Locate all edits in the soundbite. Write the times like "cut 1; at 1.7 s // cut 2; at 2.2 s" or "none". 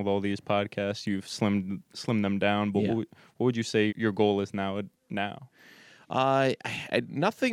cut 1; at 3.9 s